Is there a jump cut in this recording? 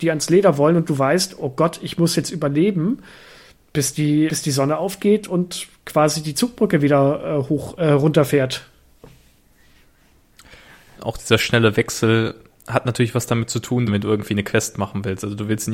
yes; 3 cuts; at 4.3 s, 11.0 s, 13.9 s

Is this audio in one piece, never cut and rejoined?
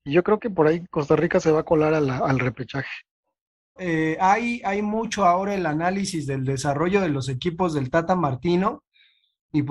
no; 1 cut; at 3.8 s

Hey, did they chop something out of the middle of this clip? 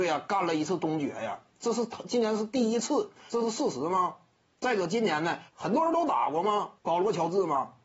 yes; 3 cuts; at 3.3 s, 5.5 s, 6.8 s

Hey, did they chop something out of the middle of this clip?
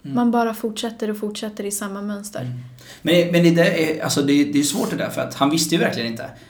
no; 0 cuts

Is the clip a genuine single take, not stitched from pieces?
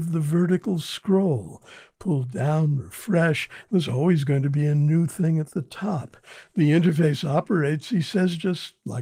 yes; 0 cuts

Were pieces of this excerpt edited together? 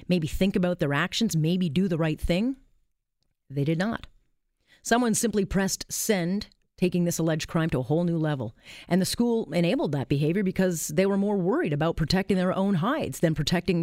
no; 0 cuts

